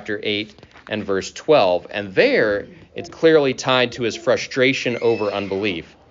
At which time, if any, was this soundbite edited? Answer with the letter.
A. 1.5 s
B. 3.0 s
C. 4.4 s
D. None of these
B